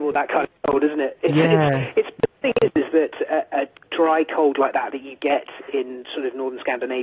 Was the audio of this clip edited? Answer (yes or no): no